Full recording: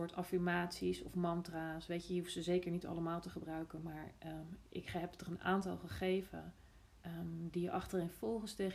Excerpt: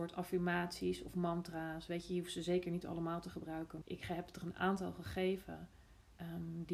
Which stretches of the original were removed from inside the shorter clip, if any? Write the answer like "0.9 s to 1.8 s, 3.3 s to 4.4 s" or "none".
3.8 s to 4.7 s